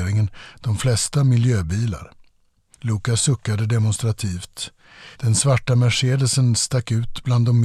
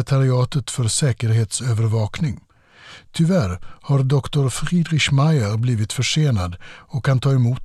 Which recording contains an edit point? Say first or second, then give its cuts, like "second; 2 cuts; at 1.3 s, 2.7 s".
first; 2 cuts; at 2.7 s, 5.1 s